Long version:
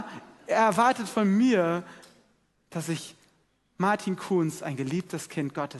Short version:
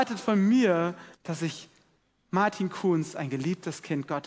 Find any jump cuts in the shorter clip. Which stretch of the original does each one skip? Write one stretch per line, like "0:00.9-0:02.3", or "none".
0:02.0-0:02.6